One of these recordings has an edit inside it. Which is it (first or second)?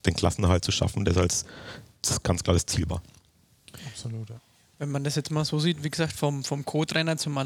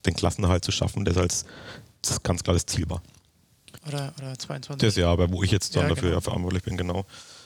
second